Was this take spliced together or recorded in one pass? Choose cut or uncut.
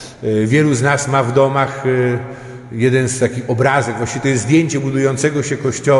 uncut